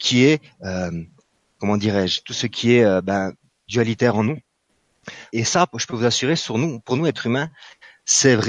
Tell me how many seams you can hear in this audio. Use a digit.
1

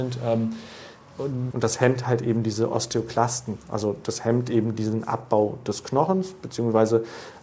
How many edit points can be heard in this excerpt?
1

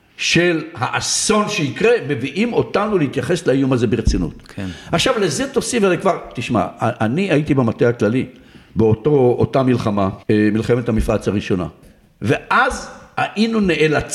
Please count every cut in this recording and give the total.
2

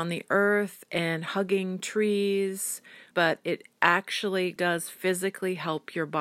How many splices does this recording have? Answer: 2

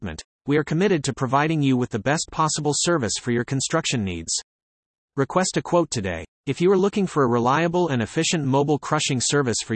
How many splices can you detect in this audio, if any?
0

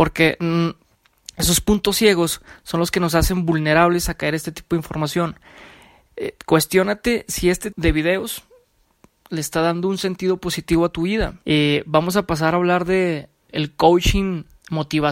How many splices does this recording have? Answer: 3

